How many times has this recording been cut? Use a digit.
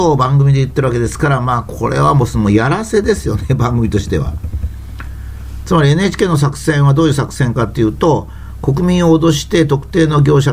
1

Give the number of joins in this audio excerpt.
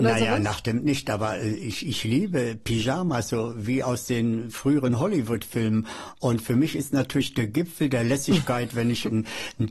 0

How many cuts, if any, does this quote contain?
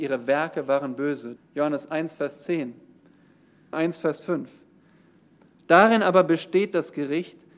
2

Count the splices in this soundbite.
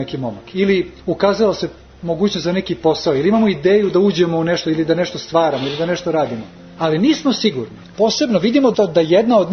1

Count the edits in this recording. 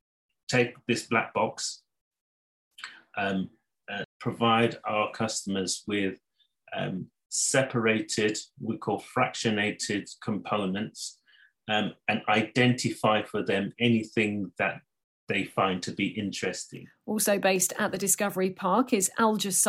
1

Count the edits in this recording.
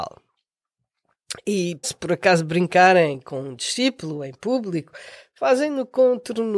1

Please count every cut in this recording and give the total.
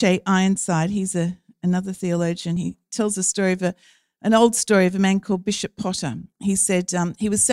0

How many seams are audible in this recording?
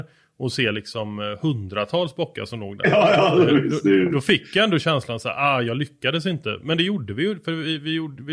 0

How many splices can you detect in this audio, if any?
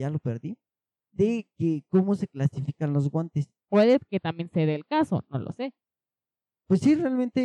1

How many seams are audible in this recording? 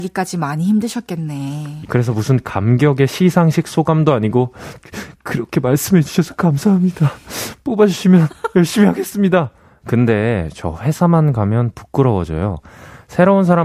2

